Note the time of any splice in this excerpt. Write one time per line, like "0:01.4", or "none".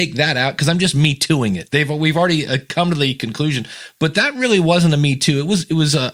none